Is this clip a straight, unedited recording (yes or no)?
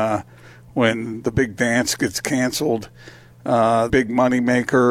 no